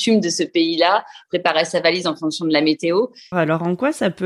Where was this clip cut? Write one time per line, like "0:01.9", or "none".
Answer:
0:03.3